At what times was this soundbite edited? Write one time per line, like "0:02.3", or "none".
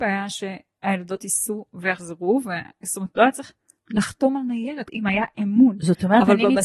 0:04.9